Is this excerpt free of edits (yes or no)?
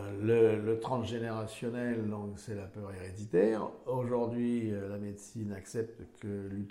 yes